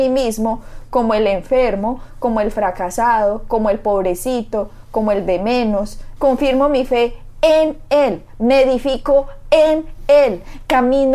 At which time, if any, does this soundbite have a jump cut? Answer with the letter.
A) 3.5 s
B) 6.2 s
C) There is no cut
B